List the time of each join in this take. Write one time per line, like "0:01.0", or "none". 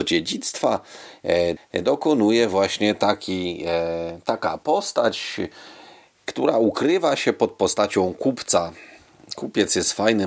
0:01.6